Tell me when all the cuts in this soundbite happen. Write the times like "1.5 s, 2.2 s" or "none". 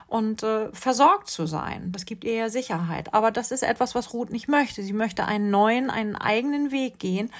none